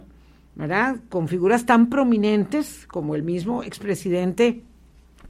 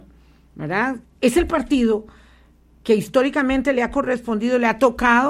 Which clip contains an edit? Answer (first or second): second